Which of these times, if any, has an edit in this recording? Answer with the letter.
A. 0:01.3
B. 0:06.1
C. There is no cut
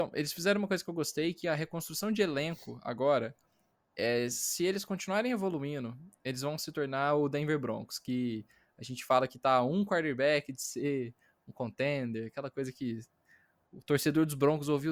C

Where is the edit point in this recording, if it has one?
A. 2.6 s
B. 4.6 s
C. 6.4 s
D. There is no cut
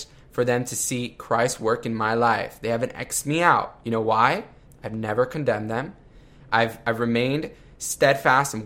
B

